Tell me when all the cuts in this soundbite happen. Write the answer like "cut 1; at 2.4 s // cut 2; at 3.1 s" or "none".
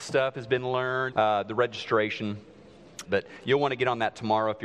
cut 1; at 1.1 s // cut 2; at 3.0 s